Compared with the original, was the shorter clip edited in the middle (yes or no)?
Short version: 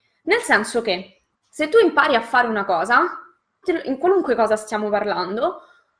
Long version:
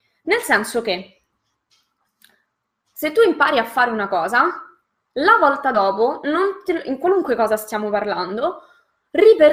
yes